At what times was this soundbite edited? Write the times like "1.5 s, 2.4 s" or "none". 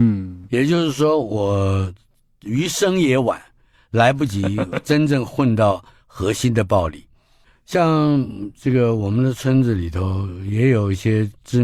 none